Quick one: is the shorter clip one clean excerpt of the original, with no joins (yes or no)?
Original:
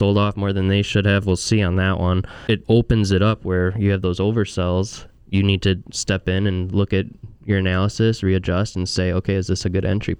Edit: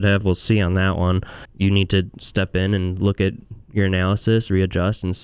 no